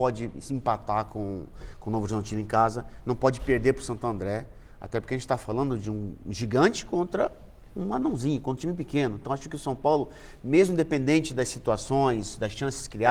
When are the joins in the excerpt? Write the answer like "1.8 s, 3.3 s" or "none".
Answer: none

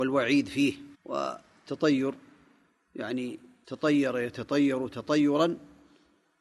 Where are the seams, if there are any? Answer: 0.9 s

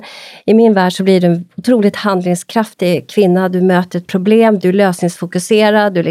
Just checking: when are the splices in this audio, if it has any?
4.6 s

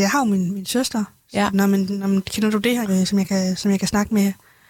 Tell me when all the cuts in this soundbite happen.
1.5 s, 2.8 s

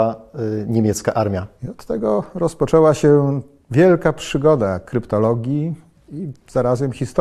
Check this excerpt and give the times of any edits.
1.6 s

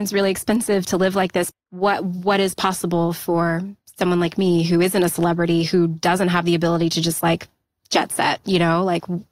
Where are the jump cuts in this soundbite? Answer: 1.5 s

